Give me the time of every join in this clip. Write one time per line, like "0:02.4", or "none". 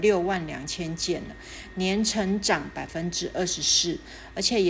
none